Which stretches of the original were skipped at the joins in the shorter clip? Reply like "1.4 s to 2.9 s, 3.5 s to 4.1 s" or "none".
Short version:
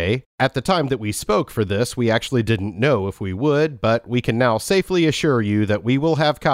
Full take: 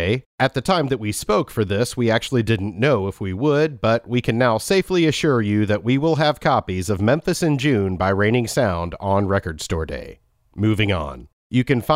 none